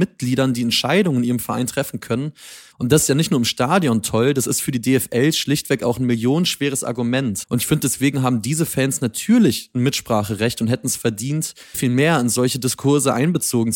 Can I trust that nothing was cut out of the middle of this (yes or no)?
no